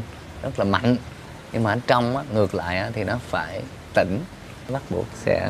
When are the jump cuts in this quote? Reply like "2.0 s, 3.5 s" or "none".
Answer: none